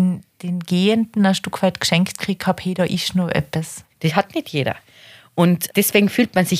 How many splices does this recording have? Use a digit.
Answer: 2